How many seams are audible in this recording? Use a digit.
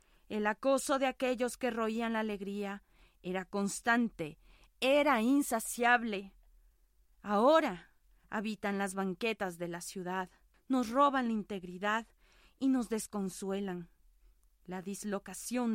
1